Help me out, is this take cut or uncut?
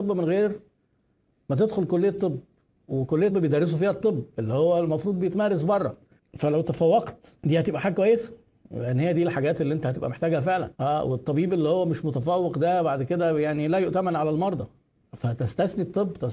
cut